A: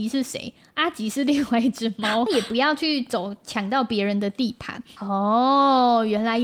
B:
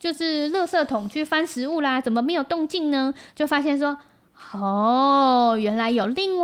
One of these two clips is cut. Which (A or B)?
A